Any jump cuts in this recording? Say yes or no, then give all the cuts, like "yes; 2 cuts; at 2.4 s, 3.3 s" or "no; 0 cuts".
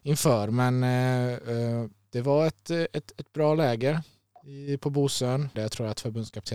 yes; 1 cut; at 5.5 s